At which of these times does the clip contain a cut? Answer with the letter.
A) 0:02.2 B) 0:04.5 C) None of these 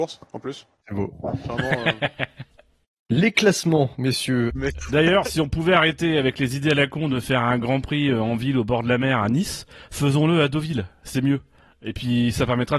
B